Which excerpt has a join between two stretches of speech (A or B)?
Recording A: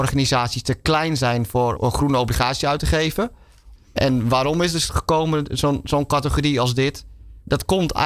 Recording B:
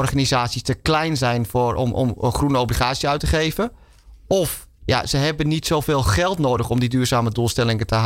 A